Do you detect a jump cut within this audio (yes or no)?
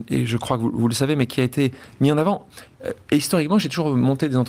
no